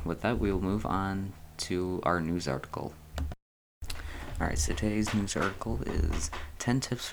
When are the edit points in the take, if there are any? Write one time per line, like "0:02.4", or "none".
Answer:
none